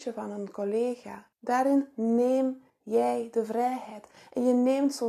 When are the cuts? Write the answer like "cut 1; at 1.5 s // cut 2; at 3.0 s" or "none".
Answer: cut 1; at 1.3 s

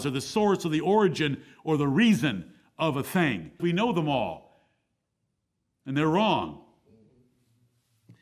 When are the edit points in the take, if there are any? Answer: cut 1; at 3.6 s

